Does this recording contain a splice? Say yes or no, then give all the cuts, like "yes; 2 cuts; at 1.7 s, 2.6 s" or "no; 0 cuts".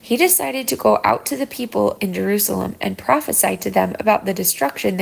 no; 0 cuts